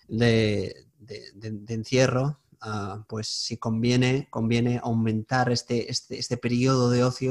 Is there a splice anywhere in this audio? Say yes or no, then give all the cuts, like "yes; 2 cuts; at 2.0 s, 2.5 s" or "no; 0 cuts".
no; 0 cuts